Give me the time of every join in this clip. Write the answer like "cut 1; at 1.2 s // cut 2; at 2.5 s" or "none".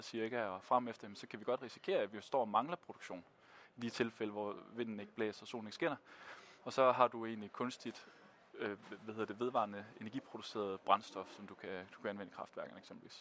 cut 1; at 6.6 s